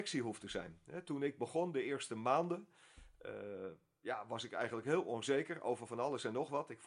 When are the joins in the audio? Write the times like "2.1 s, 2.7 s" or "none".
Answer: none

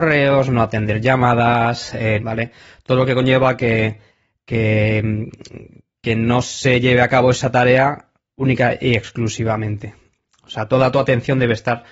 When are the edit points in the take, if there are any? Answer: 2.2 s

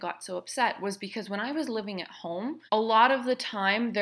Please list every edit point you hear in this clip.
2.7 s

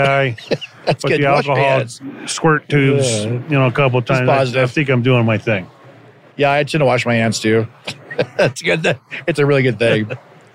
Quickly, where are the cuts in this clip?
none

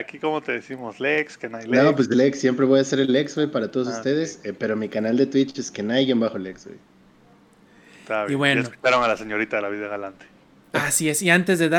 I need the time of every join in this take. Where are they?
2.1 s

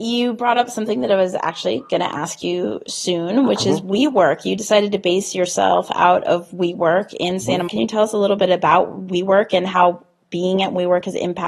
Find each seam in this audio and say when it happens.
7.7 s

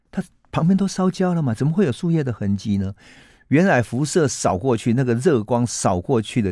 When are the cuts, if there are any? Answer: none

